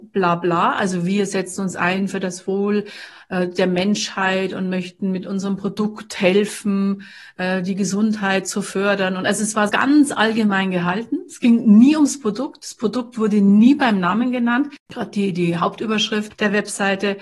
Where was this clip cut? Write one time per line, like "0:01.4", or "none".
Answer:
0:09.7
0:14.9